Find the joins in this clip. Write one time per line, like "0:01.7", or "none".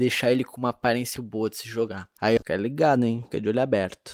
0:01.2
0:02.4